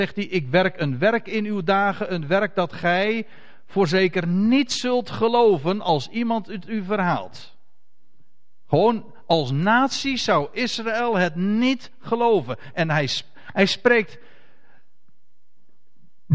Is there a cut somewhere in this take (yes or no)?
no